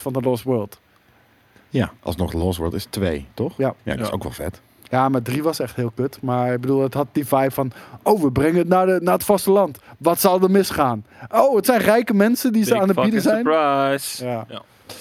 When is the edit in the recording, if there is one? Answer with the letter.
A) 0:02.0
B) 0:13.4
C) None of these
A